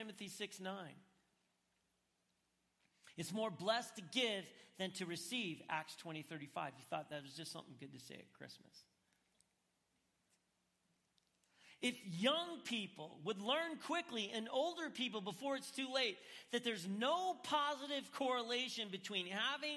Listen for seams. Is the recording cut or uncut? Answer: uncut